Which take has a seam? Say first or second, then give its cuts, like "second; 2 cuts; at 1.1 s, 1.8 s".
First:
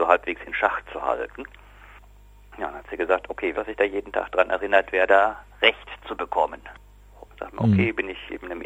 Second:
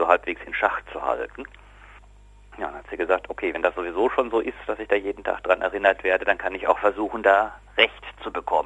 first; 3 cuts; at 3.5 s, 5.1 s, 7.3 s